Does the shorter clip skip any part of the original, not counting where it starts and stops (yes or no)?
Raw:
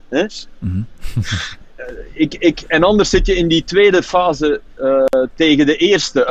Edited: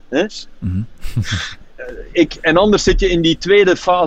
yes